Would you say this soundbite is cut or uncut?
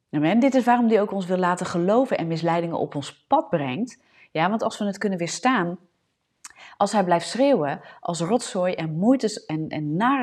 uncut